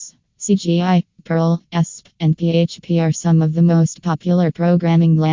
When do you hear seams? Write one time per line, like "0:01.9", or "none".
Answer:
none